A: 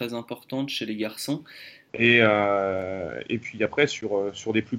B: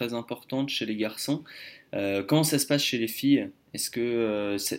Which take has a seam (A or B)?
A